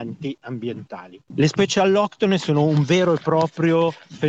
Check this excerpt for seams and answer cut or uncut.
cut